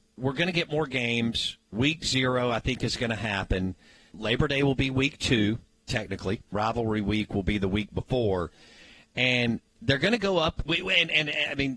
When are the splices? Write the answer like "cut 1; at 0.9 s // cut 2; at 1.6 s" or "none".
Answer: cut 1; at 4.1 s // cut 2; at 6.5 s // cut 3; at 10.7 s